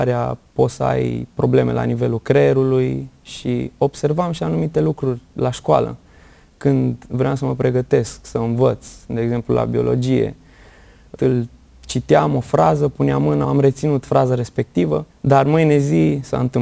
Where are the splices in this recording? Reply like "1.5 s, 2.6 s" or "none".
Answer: 11.2 s, 13.4 s, 15.1 s